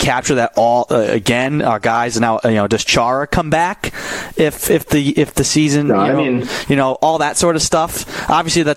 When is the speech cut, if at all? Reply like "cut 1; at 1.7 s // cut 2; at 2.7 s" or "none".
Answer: none